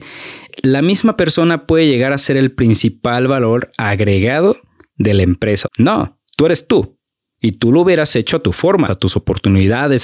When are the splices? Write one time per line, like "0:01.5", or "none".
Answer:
0:05.7
0:08.9